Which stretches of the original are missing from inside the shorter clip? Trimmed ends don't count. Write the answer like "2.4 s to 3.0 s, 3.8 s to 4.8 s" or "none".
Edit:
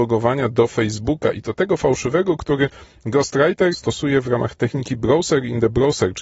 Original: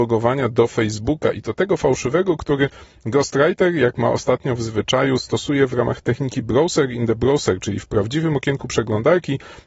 3.7 s to 5.2 s